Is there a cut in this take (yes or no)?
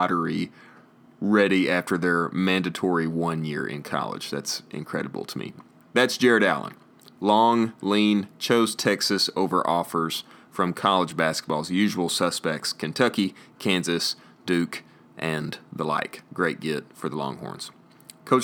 yes